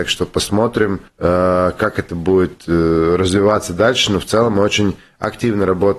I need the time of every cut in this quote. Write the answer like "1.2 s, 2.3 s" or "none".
1.1 s